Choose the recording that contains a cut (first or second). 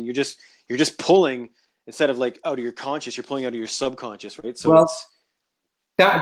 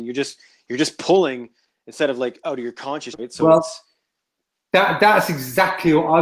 second